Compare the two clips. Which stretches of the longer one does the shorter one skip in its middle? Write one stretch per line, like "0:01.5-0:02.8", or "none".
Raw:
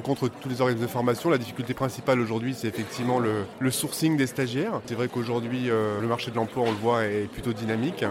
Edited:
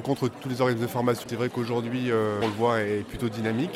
0:01.2-0:04.8
0:06.0-0:06.7